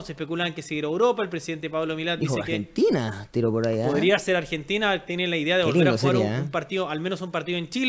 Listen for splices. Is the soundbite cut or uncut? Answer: uncut